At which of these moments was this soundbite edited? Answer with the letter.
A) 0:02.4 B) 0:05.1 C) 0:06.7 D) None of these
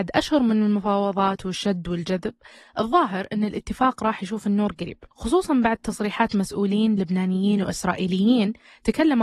B